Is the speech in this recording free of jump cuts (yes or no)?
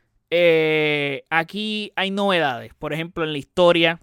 yes